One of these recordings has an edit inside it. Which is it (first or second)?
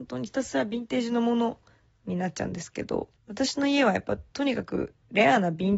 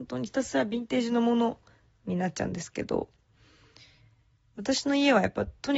first